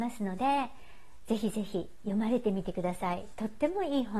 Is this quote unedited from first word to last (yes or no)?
yes